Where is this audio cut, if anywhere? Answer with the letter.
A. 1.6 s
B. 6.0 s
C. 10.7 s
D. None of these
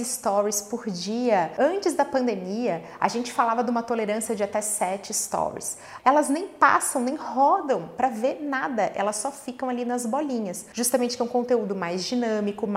B